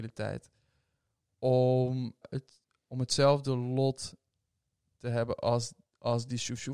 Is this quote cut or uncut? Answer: cut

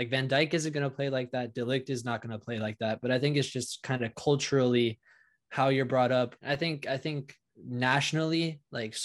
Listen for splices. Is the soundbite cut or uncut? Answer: cut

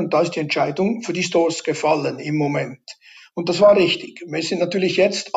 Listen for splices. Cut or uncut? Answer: uncut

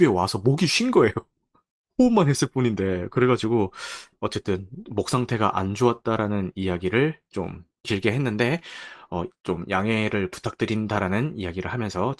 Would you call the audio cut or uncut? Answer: cut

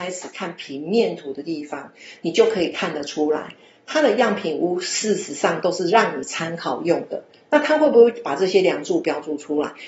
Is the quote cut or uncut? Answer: uncut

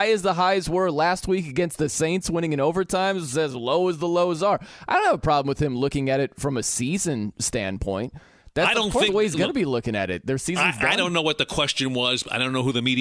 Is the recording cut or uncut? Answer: cut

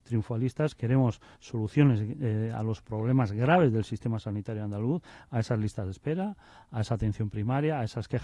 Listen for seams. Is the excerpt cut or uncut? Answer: uncut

